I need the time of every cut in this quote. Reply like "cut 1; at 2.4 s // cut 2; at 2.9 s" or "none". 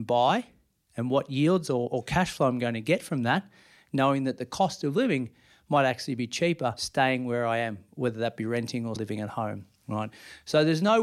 cut 1; at 9.0 s